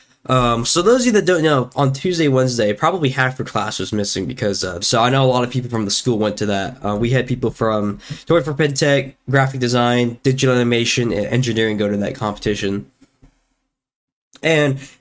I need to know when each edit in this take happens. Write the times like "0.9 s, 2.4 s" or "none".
4.8 s